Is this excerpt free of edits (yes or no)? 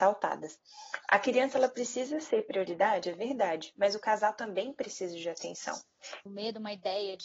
no